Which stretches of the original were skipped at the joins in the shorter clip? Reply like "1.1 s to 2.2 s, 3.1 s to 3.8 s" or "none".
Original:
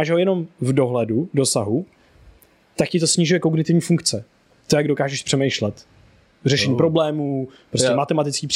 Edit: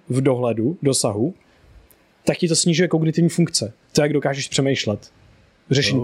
4.3 s to 4.6 s